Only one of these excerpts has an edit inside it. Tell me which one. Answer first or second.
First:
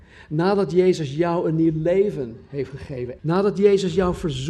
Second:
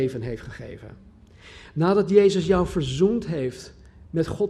first